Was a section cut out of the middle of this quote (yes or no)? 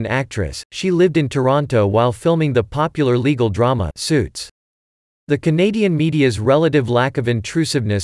no